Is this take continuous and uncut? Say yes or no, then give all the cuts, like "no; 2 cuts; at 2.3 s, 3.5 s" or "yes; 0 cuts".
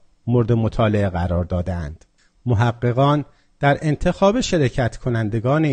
yes; 0 cuts